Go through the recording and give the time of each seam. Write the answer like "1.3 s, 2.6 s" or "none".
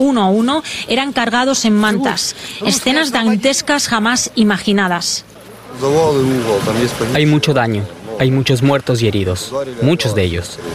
none